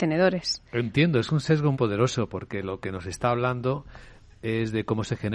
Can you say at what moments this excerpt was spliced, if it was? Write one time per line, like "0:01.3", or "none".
0:01.7